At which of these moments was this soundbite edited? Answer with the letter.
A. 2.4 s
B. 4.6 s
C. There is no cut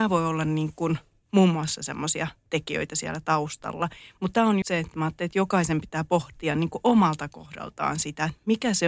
B